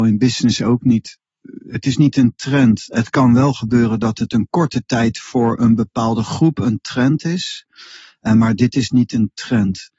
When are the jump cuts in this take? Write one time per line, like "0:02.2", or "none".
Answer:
none